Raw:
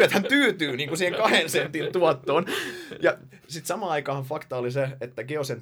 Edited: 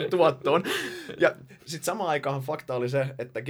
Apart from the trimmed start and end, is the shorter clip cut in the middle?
no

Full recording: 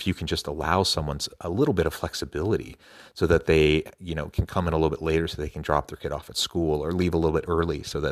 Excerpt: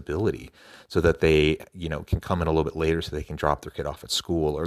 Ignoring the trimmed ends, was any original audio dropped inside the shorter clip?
no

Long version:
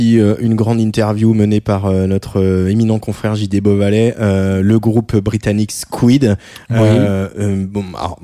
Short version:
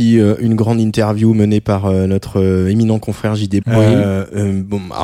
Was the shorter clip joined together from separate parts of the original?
yes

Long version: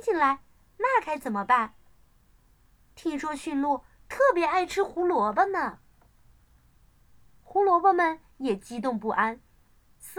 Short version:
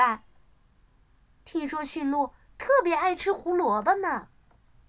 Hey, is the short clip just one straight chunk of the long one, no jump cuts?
yes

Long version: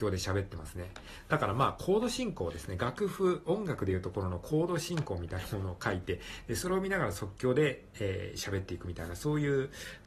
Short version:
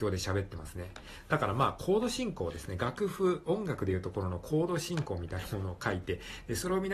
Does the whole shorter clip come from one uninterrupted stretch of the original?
yes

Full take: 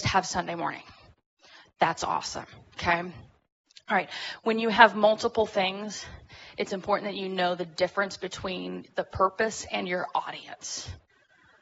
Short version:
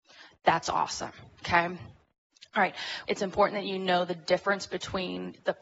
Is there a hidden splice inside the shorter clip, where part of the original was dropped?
yes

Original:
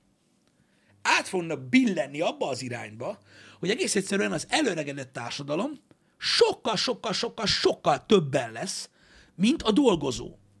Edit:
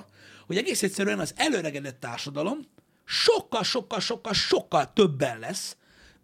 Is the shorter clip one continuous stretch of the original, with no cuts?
yes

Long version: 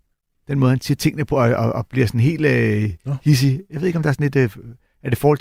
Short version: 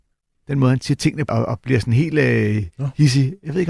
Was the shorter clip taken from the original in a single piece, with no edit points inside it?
no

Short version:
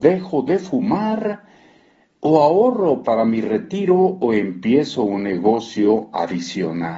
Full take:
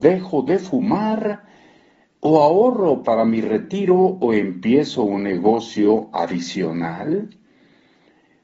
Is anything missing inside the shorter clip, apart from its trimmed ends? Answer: no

